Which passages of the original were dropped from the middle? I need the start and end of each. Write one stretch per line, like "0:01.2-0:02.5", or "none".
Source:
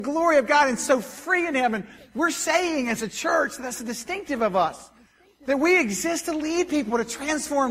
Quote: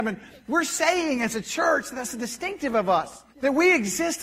0:05.0-0:05.4